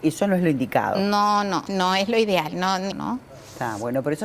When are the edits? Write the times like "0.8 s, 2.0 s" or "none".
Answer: 1.7 s, 2.9 s